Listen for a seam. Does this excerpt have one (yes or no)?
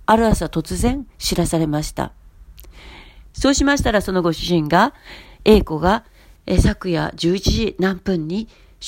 yes